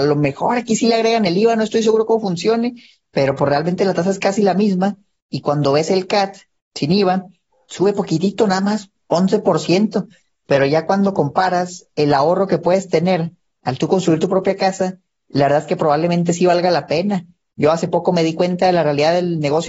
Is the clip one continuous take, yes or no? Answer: yes